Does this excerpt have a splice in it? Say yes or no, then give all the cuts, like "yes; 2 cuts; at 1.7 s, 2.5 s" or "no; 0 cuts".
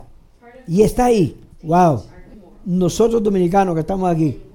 yes; 1 cut; at 1.5 s